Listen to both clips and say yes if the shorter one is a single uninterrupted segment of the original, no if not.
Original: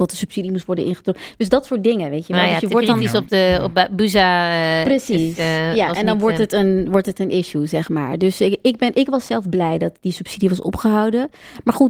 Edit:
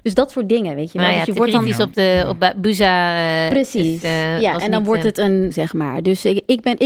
no